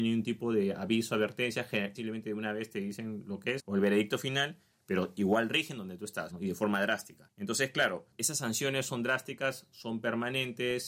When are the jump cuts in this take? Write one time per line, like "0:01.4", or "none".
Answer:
0:01.9
0:04.7
0:06.3